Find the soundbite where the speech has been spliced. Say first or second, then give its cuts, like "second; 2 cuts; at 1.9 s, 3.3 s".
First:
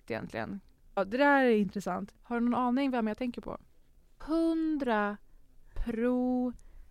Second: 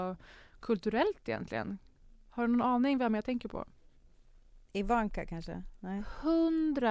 first; 3 cuts; at 1.0 s, 2.2 s, 4.2 s